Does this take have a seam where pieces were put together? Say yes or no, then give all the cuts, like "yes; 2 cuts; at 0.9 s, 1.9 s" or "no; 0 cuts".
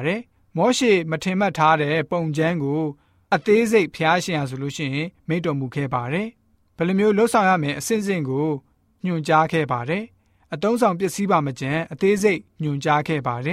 no; 0 cuts